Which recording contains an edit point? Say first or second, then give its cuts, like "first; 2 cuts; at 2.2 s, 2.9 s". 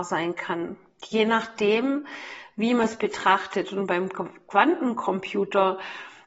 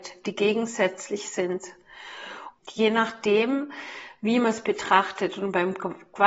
second; 1 cut; at 2.6 s